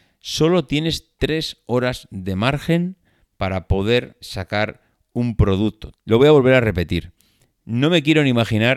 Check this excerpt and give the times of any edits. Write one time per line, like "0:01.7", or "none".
0:04.2
0:05.9
0:07.5